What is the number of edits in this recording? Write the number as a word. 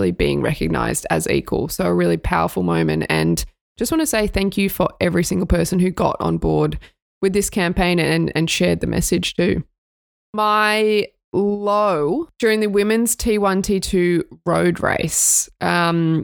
zero